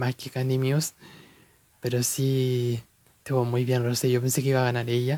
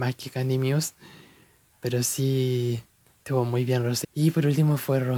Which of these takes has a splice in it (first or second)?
second